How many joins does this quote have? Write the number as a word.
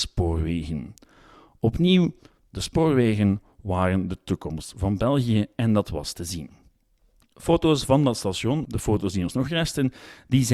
one